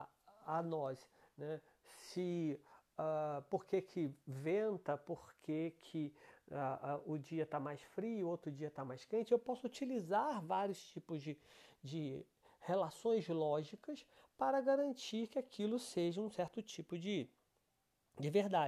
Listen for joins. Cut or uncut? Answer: uncut